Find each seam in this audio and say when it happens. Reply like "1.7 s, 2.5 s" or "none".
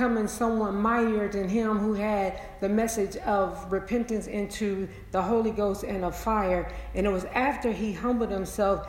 none